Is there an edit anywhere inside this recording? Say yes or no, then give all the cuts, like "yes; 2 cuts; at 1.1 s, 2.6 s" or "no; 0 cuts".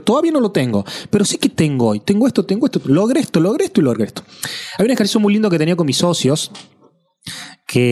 no; 0 cuts